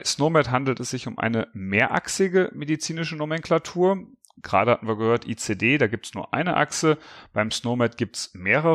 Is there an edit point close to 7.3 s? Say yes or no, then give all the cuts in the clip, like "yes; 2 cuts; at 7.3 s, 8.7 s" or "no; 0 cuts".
no; 0 cuts